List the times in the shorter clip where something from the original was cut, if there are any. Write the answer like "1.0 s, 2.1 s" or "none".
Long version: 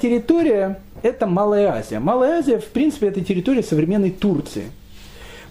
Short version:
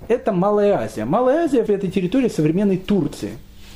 1.7 s